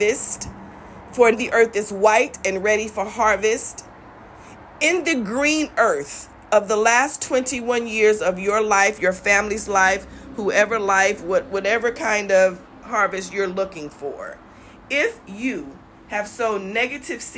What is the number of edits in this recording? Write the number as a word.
one